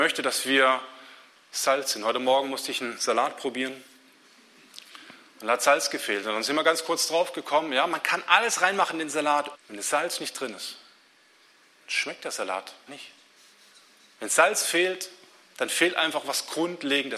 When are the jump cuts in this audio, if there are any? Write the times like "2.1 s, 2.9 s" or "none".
9.5 s, 12.9 s

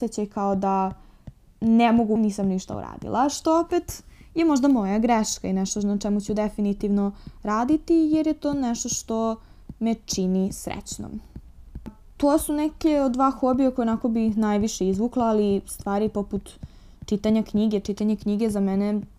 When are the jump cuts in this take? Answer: 2.2 s

